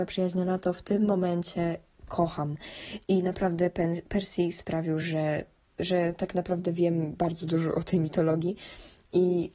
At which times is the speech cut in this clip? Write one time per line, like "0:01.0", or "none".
none